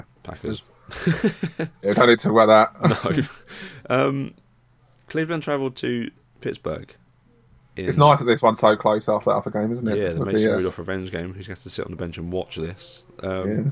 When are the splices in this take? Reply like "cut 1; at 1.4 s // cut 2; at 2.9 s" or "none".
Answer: none